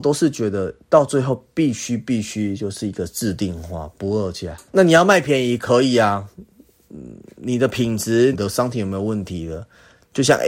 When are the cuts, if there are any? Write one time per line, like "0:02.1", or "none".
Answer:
0:04.7
0:08.3